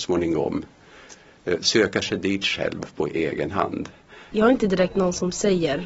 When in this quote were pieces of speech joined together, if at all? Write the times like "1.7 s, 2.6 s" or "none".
4.3 s